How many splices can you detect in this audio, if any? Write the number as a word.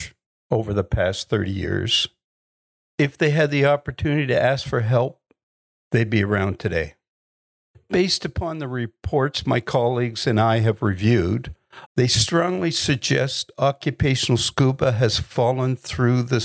one